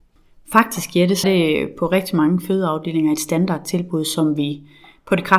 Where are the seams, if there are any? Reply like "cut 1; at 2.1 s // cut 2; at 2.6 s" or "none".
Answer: cut 1; at 1.2 s